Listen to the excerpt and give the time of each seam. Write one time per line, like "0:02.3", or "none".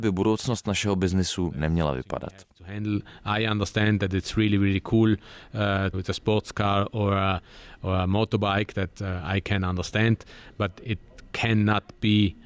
0:05.9